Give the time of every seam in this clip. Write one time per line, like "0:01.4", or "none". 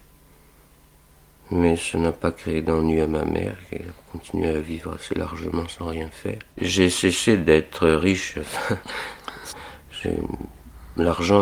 0:06.5
0:09.5